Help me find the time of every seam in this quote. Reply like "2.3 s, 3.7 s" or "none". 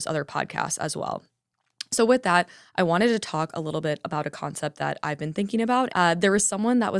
5.9 s